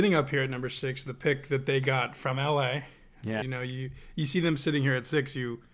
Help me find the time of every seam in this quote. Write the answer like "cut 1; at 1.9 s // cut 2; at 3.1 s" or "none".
cut 1; at 3.4 s